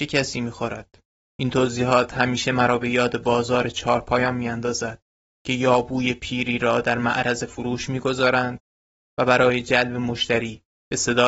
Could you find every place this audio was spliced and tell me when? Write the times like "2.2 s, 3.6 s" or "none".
1.3 s